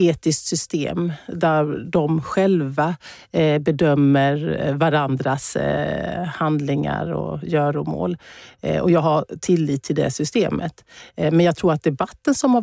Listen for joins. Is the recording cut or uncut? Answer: uncut